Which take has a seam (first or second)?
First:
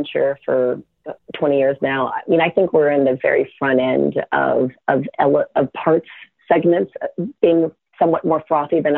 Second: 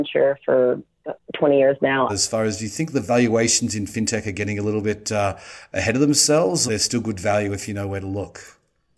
second